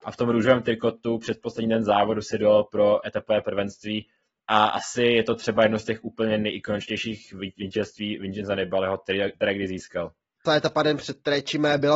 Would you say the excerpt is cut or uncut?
cut